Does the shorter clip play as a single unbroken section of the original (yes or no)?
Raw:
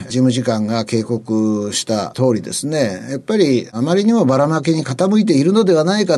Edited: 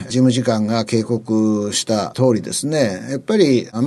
yes